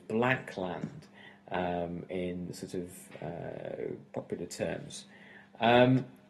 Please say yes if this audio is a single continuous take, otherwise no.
yes